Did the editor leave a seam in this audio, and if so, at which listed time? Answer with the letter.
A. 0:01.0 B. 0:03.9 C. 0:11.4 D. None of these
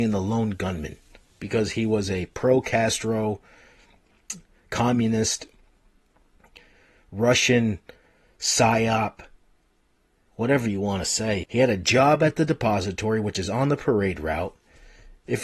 C